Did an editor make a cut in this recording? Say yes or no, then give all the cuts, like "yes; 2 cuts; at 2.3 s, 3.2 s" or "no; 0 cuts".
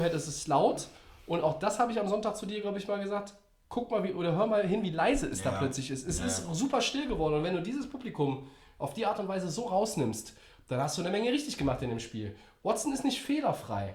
no; 0 cuts